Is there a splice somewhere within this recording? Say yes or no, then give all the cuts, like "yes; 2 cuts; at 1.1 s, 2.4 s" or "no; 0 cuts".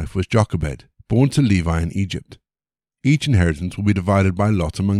yes; 2 cuts; at 1.0 s, 2.9 s